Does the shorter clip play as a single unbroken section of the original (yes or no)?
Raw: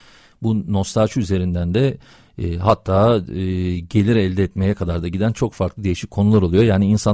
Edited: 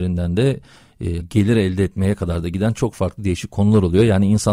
no